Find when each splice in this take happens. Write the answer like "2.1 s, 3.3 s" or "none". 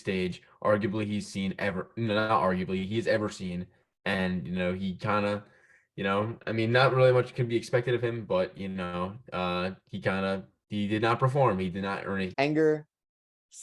12.3 s